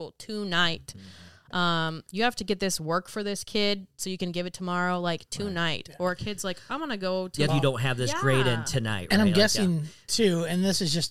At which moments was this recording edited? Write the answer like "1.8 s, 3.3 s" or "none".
7.5 s